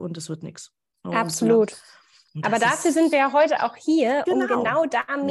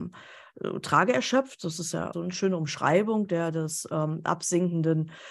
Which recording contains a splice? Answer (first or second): second